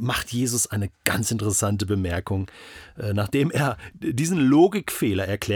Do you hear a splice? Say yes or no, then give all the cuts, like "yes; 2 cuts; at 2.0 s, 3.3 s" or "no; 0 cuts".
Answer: no; 0 cuts